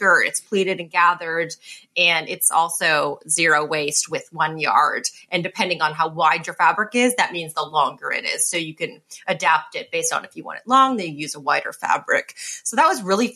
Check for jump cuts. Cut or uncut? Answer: uncut